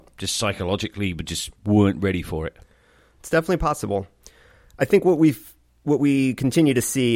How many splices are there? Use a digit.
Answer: 1